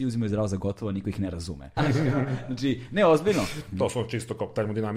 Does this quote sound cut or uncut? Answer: cut